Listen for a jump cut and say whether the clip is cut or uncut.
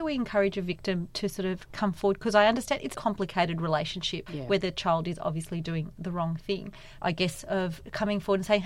cut